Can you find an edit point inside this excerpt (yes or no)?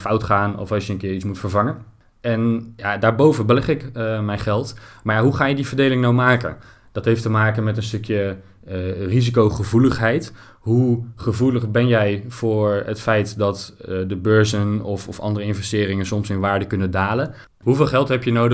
no